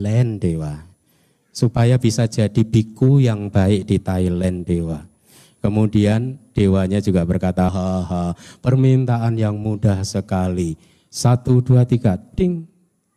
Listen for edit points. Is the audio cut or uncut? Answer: cut